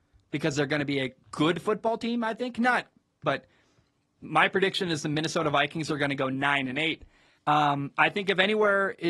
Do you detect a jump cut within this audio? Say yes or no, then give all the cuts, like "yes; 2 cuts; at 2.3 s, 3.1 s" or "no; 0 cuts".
yes; 2 cuts; at 3.2 s, 7.4 s